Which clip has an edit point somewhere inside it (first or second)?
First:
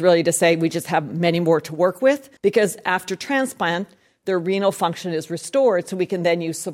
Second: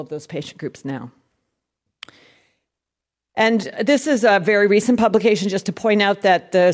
first